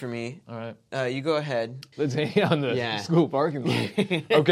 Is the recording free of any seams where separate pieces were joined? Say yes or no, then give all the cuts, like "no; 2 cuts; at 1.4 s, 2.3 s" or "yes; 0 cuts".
no; 1 cut; at 1.9 s